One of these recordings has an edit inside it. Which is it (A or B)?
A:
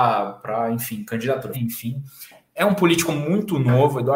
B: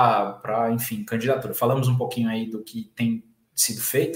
A